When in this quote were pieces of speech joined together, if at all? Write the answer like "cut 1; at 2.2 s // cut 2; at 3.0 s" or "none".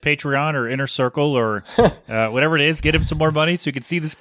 none